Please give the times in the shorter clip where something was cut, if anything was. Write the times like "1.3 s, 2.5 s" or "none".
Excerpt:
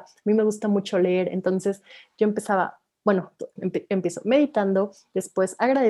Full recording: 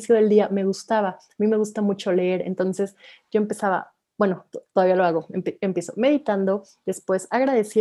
3.6 s